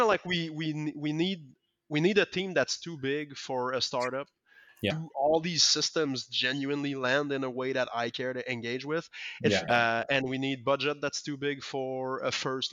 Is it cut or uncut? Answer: cut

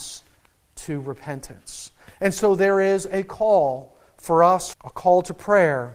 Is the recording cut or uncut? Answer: cut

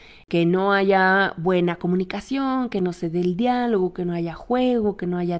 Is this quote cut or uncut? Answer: uncut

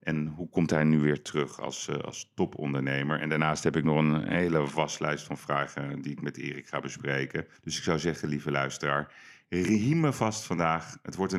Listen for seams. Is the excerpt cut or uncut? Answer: cut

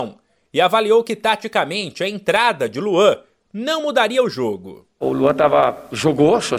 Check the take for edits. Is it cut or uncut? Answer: uncut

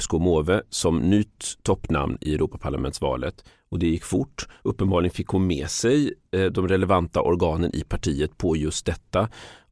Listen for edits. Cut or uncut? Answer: uncut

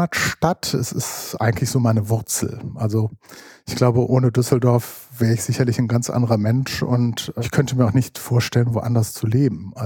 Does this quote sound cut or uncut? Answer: uncut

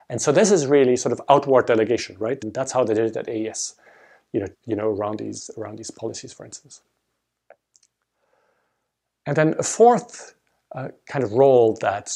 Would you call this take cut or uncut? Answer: cut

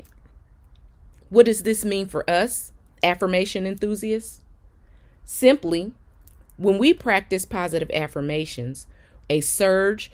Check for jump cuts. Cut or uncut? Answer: cut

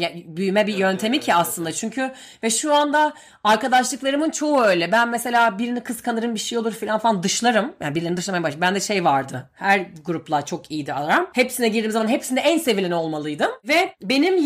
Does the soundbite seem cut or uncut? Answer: uncut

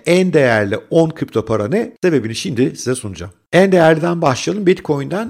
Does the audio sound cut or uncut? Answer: cut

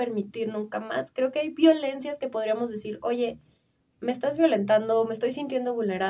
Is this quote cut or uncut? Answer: uncut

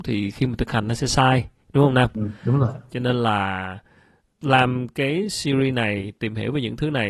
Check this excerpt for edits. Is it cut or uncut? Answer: cut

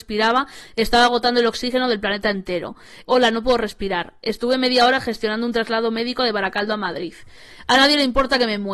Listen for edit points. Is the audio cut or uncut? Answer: cut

